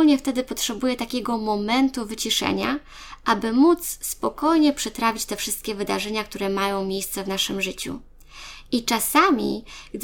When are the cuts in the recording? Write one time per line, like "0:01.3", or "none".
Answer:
none